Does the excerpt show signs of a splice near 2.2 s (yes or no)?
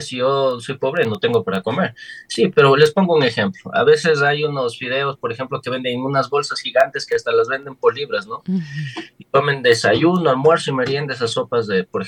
no